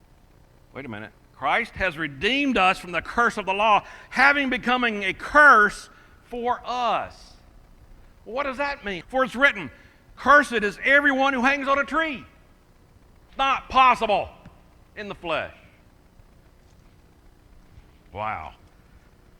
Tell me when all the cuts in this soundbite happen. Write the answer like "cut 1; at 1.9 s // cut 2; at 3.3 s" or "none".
cut 1; at 9.0 s // cut 2; at 13.3 s